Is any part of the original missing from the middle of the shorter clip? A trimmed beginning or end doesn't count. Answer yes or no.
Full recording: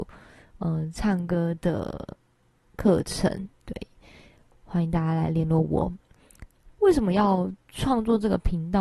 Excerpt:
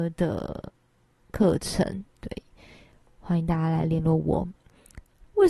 no